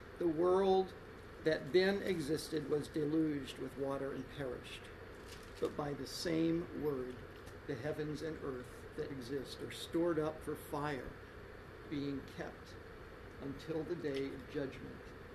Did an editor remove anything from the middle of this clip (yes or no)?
yes